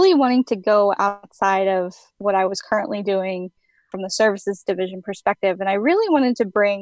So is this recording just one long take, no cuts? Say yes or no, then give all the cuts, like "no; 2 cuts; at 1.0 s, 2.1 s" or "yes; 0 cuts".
yes; 0 cuts